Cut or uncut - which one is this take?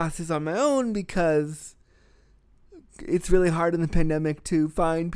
uncut